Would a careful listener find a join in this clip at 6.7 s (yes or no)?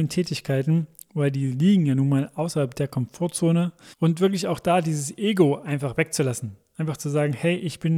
no